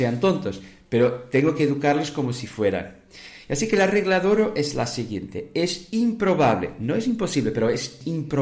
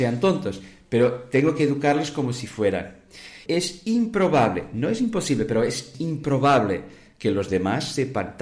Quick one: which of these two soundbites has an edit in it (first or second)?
second